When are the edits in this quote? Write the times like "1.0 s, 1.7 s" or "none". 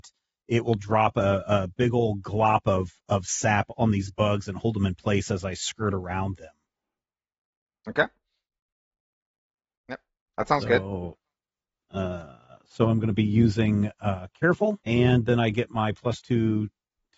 none